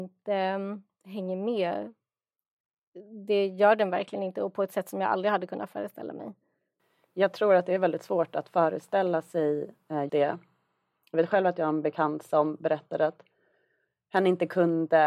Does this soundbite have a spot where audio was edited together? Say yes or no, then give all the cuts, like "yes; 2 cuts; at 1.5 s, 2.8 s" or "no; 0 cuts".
yes; 1 cut; at 10.1 s